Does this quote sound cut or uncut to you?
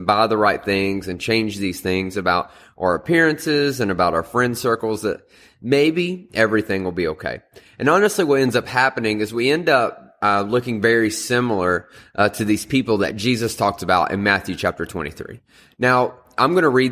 uncut